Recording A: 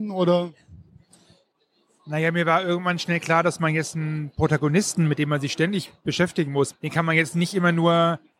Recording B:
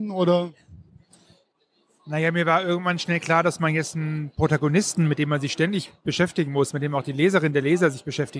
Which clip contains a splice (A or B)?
A